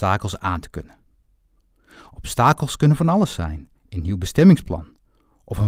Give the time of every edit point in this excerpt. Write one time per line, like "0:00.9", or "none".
0:03.8